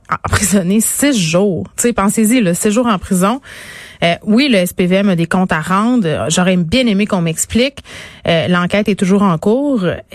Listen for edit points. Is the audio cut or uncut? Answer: uncut